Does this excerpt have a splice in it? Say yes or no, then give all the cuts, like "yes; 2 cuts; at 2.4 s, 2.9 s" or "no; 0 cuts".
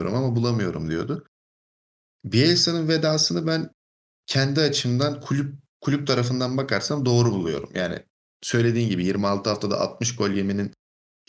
no; 0 cuts